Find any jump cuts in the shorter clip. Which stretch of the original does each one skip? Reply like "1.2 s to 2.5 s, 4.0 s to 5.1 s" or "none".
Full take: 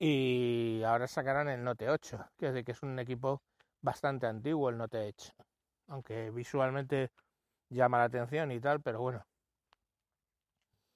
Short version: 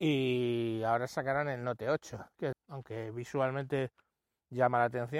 2.5 s to 5.7 s